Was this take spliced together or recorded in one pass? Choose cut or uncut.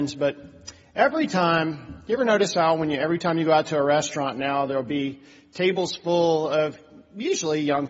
uncut